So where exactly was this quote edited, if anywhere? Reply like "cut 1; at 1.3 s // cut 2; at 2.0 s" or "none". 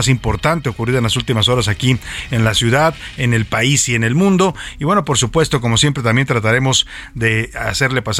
none